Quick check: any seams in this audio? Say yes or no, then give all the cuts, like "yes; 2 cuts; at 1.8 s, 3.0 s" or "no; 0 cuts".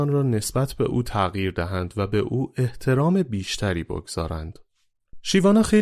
no; 0 cuts